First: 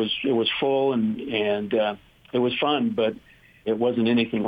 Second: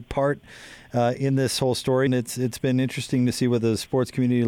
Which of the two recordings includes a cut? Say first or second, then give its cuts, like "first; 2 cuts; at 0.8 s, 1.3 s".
second; 1 cut; at 2.1 s